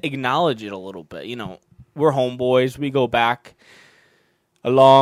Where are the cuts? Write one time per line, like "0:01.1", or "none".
none